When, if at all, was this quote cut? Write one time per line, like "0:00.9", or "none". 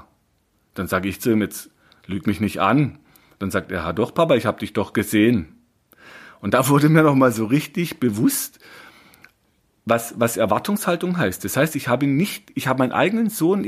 none

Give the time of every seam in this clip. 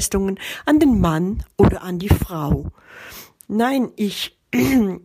none

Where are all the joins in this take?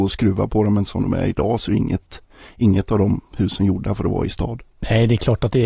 none

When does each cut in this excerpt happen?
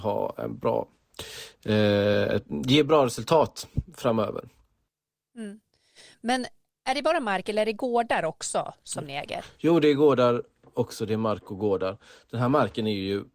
none

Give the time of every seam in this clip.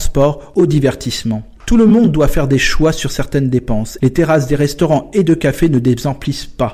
0:01.6
0:04.0

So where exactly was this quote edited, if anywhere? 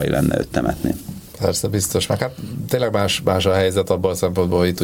none

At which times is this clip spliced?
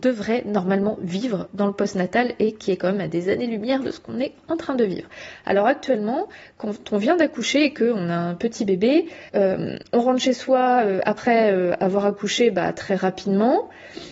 0:09.3

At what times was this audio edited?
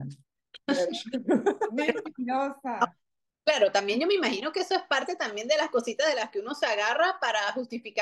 none

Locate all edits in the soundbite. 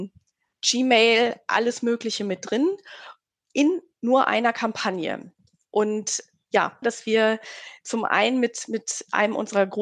0:06.8

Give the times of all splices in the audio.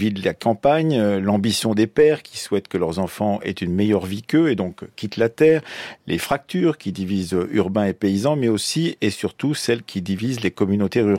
none

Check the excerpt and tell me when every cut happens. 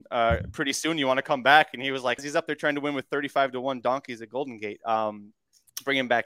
0:02.2

